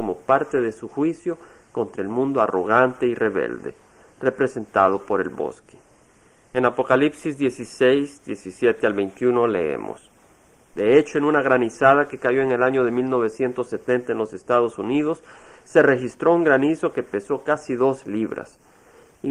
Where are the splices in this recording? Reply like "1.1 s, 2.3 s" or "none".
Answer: 6.5 s, 10.7 s